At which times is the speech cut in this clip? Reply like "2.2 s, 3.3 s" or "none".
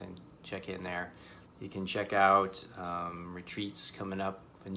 1.4 s